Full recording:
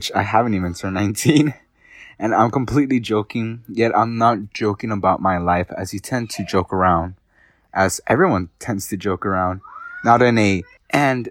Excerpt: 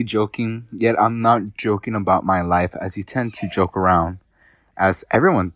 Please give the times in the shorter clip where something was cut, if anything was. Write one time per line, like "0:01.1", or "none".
none